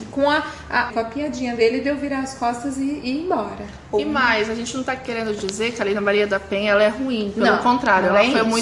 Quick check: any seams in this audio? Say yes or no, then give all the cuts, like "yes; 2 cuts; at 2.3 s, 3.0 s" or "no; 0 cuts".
yes; 1 cut; at 0.9 s